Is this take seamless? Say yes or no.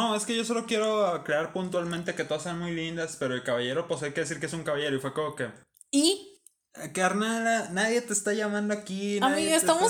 yes